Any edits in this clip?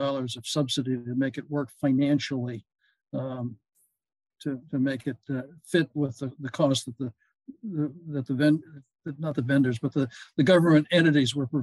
no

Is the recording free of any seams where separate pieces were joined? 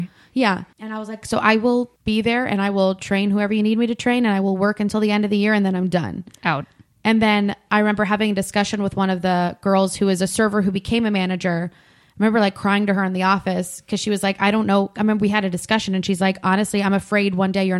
yes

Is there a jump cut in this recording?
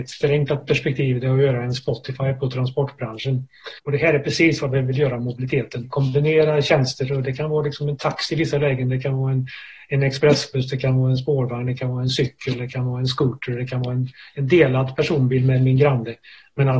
yes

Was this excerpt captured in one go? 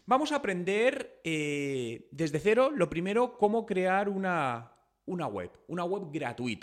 yes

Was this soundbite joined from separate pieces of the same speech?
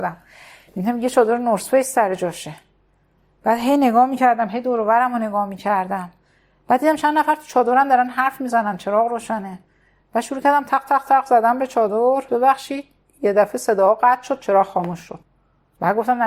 yes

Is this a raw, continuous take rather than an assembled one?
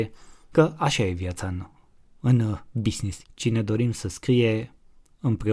no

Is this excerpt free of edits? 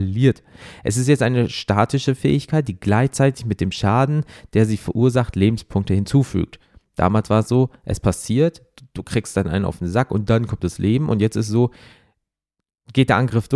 yes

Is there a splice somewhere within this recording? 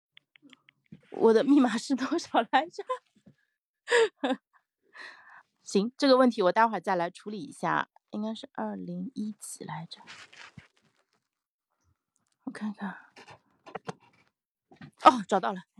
yes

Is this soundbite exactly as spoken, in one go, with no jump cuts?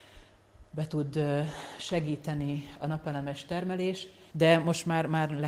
no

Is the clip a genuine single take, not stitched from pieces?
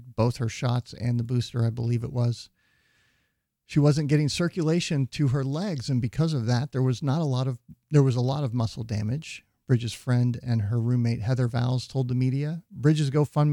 yes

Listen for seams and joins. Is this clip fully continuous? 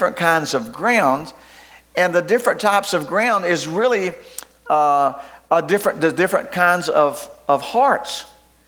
yes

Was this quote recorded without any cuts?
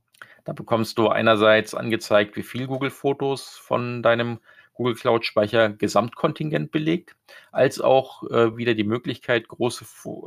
yes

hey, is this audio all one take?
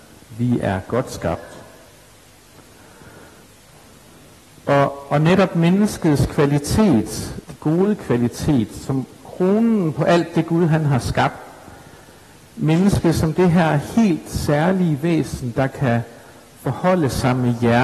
no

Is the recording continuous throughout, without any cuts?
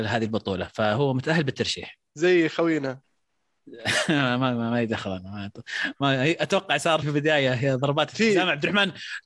no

